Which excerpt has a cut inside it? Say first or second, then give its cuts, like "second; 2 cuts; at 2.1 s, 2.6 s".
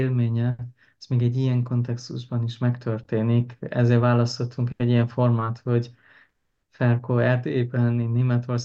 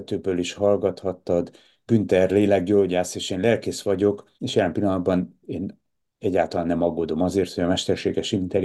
second; 1 cut; at 4.3 s